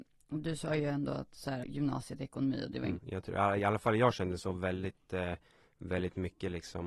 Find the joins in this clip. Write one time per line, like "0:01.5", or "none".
0:01.6
0:03.0